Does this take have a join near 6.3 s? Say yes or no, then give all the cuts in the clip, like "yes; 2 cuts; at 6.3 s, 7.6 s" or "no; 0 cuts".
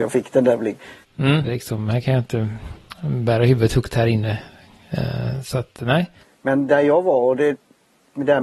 no; 1 cut; at 1.4 s